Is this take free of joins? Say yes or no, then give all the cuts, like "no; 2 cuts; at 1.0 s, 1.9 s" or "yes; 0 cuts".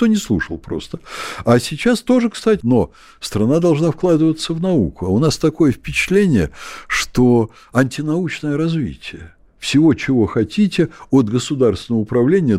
no; 1 cut; at 2.6 s